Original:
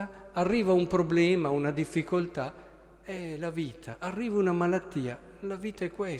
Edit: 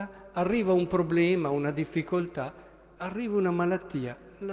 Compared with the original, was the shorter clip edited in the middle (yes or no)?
yes